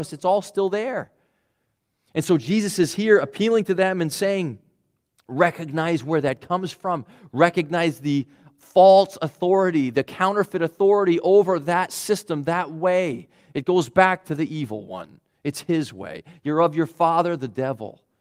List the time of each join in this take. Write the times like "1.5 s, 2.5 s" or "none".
none